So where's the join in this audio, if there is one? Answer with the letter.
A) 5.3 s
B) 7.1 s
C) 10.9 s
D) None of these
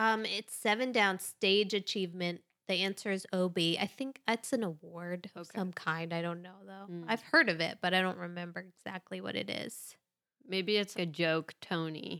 C